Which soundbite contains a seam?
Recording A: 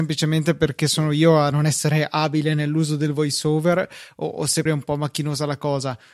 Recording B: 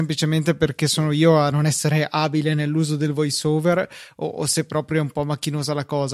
A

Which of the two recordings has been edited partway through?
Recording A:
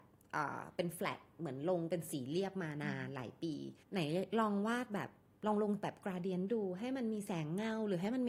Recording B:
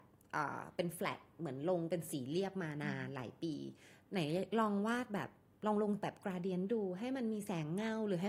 A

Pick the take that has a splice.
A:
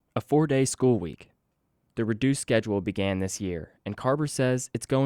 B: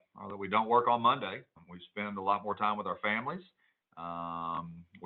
B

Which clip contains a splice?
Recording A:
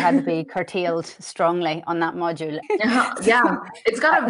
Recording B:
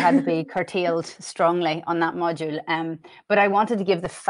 A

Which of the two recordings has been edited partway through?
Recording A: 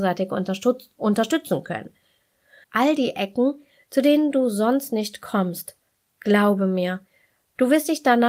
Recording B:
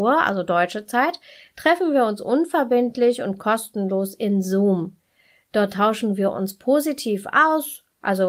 A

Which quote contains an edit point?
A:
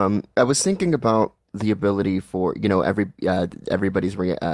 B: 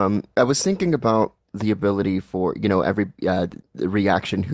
B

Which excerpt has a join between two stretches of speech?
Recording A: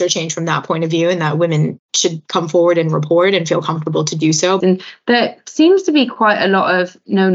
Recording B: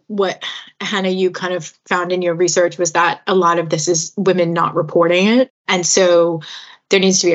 A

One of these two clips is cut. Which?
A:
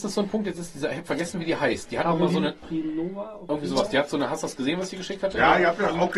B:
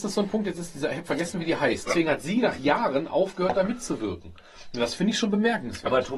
B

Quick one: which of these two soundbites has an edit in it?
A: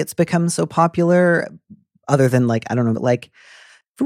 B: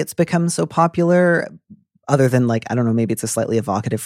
A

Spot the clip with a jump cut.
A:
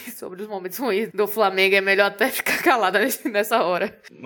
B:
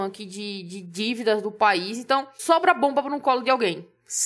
A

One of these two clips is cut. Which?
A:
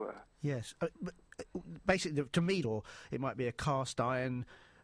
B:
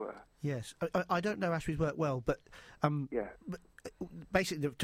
A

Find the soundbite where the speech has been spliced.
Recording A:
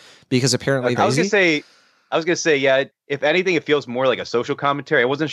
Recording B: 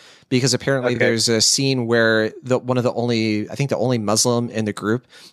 A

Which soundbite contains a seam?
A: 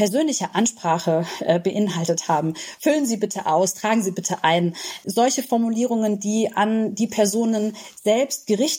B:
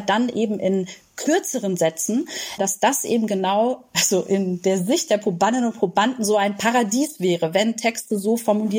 B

